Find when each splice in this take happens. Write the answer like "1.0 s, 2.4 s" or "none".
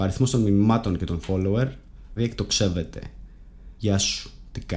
2.2 s, 3.8 s